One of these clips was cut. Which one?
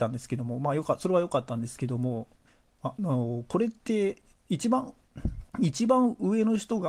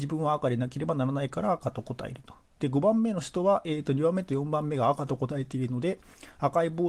first; 1 cut; at 5.5 s

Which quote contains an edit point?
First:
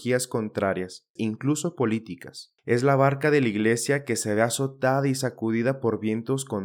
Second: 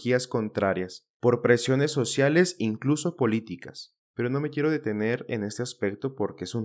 first; 2 cuts; at 1.2 s, 2.6 s

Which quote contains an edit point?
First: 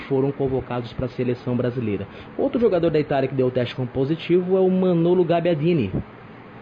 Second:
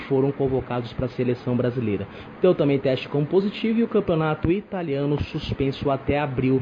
second; 1 cut; at 2.4 s

